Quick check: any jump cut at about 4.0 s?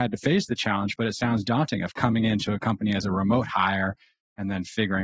no; 0 cuts

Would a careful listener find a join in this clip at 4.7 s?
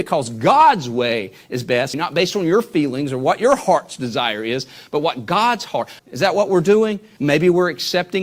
no; 3 cuts; at 1.9 s, 6.0 s, 7.2 s

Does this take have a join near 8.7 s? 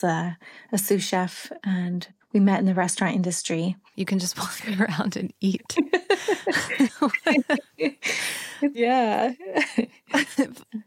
yes; 2 cuts; at 3.9 s, 8.7 s

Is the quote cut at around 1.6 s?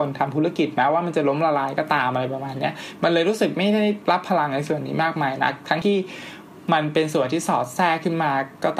no; 1 cut; at 5.8 s

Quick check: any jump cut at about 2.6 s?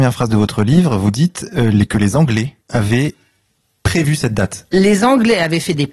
yes; 1 cut; at 2.6 s

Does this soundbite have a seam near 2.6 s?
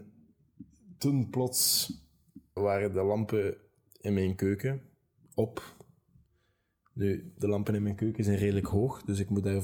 yes; 1 cut; at 2.6 s

